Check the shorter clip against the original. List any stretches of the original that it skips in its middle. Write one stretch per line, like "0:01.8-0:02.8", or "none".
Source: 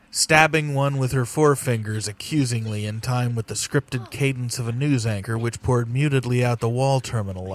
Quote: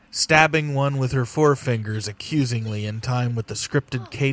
none